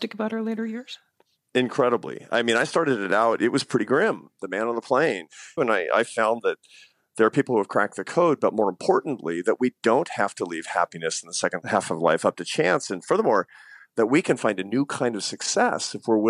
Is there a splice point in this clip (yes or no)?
yes